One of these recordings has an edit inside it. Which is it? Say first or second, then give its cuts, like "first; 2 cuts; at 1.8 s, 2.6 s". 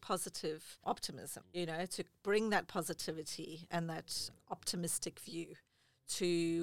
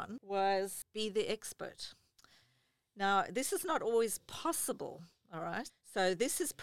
second; 1 cut; at 5.7 s